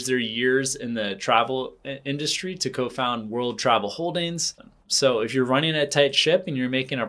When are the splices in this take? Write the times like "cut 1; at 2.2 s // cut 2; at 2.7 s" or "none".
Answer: cut 1; at 4.6 s

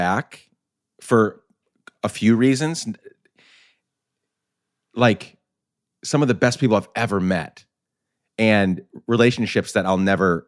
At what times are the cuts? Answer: none

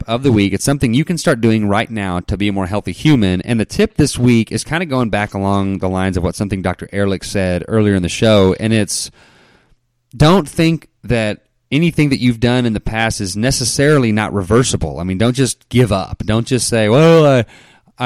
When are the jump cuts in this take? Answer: none

